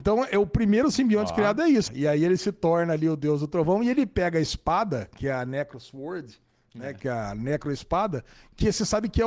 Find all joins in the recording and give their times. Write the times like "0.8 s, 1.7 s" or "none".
1.9 s, 7.0 s

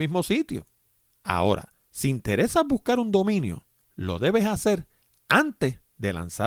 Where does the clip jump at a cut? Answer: none

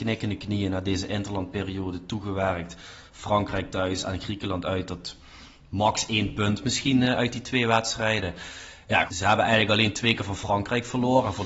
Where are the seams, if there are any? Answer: 9.1 s

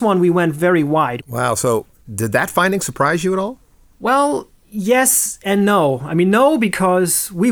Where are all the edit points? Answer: 1.2 s

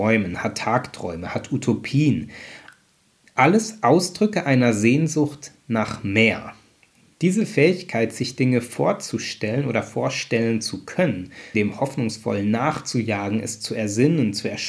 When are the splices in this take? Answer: 11.5 s

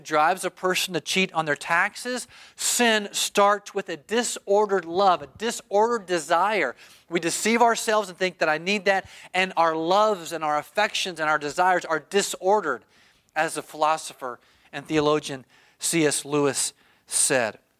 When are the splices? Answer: none

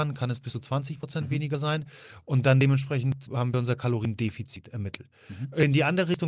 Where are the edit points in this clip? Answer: 3.3 s

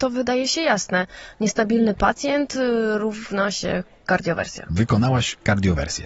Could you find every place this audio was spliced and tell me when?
4.7 s

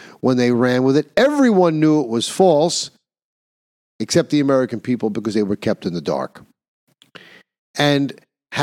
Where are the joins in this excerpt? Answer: none

